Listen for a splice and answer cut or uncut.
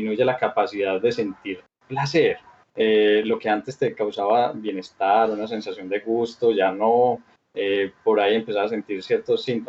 uncut